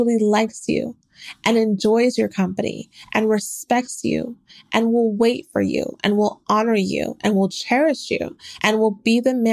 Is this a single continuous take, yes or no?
yes